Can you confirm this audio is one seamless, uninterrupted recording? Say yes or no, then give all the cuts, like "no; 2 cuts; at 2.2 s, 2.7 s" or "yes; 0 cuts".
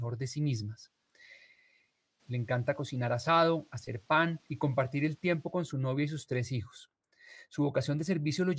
no; 2 cuts; at 2.2 s, 4.5 s